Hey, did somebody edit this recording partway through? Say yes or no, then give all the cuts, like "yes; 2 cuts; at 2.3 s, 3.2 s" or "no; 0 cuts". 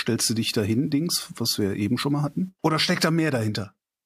yes; 1 cut; at 2.6 s